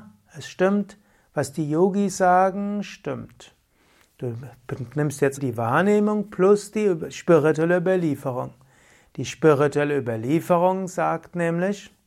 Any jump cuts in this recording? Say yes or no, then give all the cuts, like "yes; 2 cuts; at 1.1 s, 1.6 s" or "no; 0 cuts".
yes; 1 cut; at 5.4 s